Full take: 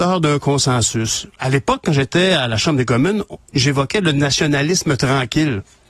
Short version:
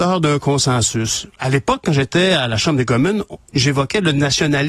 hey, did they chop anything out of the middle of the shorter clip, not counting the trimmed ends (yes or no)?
no